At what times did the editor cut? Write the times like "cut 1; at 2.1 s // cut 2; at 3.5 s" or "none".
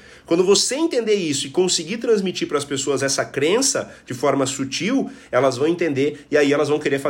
none